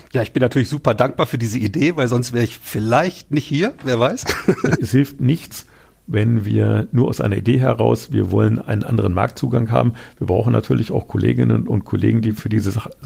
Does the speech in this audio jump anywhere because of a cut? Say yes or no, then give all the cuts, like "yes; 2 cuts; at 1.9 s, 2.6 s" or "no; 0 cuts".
yes; 1 cut; at 4.7 s